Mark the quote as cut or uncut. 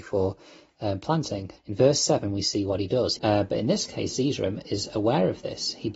cut